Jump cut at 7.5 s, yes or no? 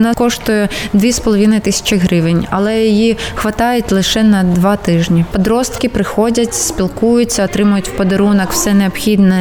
yes